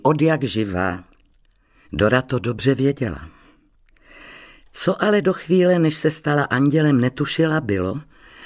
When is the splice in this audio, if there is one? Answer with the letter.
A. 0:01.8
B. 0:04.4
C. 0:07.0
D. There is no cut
A